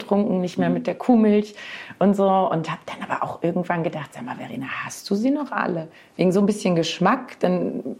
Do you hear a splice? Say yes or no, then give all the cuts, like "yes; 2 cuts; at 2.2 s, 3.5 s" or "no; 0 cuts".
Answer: no; 0 cuts